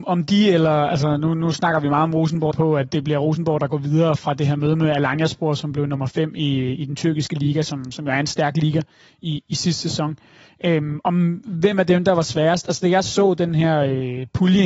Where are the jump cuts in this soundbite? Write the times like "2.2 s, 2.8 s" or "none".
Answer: 2.5 s